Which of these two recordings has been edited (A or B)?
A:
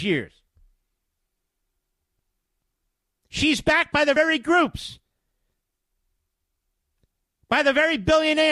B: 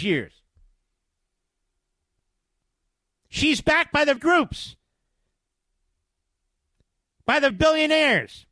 B